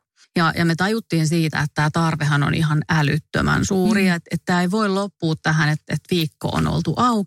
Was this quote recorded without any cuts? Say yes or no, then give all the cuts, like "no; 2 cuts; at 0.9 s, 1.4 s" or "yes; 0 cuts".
yes; 0 cuts